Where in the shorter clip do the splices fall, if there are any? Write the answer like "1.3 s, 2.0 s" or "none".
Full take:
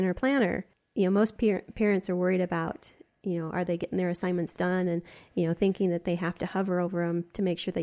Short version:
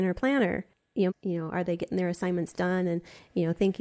1.1 s